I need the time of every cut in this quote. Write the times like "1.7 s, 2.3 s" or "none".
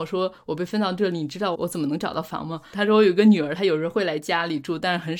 1.5 s, 2.7 s

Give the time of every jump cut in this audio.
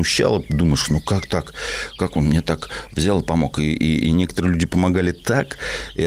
none

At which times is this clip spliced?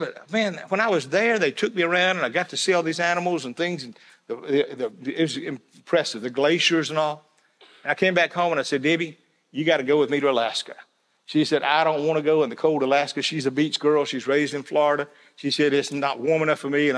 none

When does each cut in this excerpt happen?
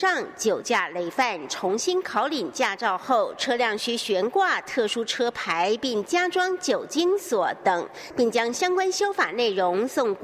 none

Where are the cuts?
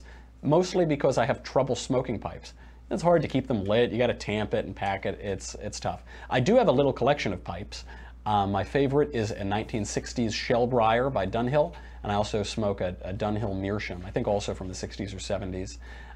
none

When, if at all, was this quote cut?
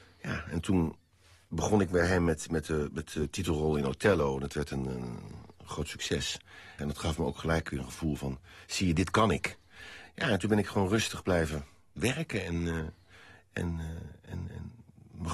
6.8 s

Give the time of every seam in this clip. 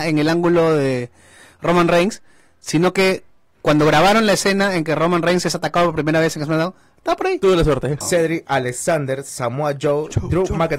8.0 s

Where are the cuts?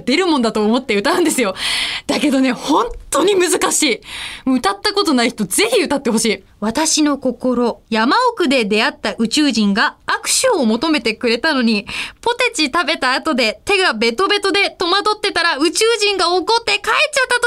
6.5 s, 7.8 s

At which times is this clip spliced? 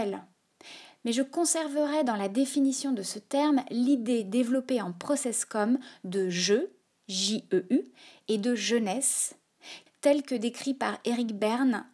9.9 s

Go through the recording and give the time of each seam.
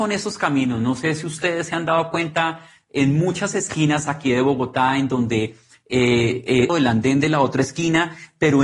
6.7 s

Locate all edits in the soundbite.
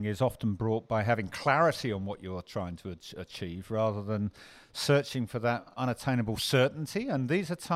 5.8 s

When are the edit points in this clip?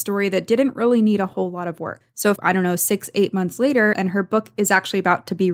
2.4 s, 3.9 s

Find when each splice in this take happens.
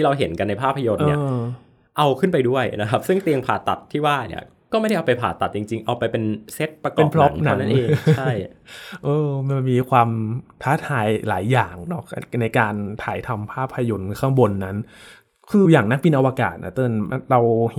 15.6 s

